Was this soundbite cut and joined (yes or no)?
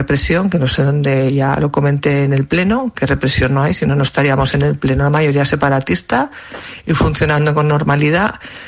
no